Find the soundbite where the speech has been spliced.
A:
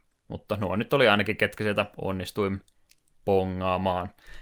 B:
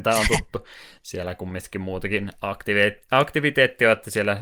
B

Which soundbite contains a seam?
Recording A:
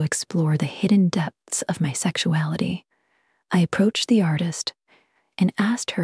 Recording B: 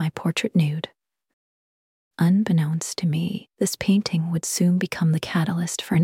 B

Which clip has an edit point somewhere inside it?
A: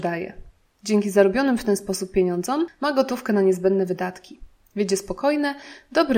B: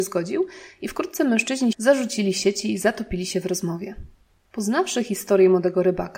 B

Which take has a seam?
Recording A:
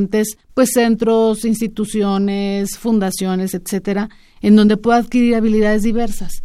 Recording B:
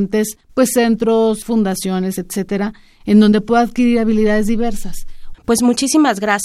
B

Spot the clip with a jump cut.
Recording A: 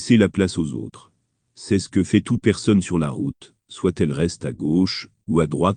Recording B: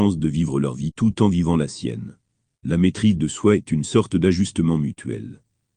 A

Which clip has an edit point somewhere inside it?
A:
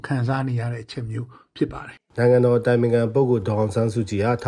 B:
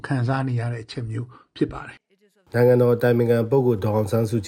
A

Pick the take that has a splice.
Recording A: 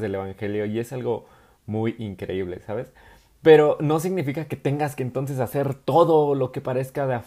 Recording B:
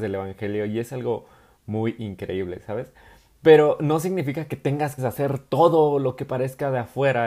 B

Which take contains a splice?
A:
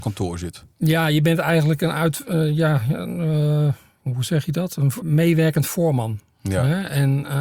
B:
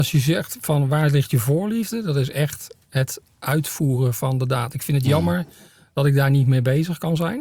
A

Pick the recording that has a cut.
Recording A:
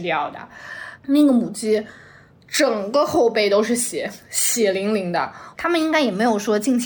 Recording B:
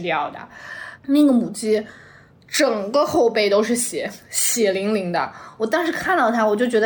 A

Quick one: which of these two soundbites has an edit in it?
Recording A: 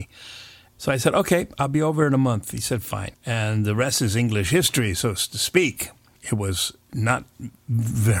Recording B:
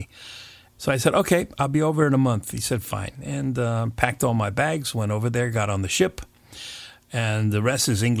A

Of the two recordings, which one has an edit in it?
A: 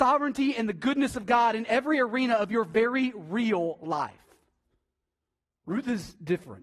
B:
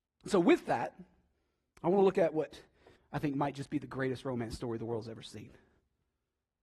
B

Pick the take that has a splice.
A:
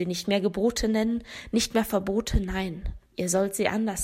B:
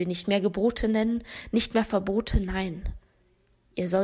A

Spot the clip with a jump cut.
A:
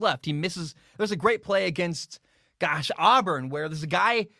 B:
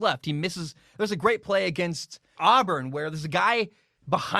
B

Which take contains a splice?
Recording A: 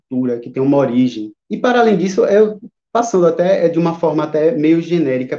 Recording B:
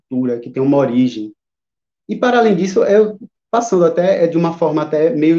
A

